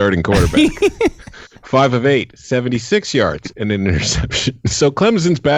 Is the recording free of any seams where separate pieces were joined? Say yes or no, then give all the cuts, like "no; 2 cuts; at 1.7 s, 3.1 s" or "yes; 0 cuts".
no; 1 cut; at 3.5 s